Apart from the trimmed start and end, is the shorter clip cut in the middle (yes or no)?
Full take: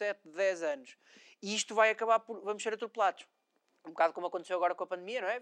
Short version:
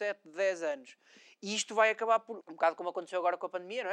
yes